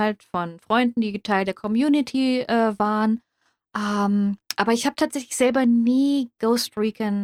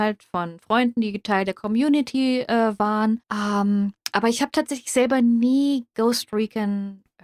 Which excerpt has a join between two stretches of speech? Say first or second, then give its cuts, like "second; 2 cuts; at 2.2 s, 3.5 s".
second; 1 cut; at 3.2 s